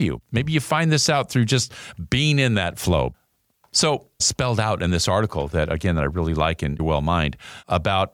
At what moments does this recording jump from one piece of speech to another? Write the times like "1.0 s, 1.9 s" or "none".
4.2 s, 6.8 s